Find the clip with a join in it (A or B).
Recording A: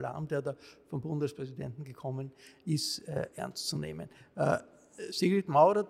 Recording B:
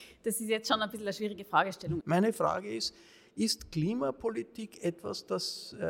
B